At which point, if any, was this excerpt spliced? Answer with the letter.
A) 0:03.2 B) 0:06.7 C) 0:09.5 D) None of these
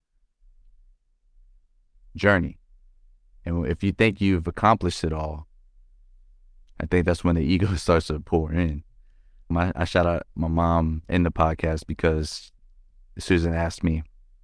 C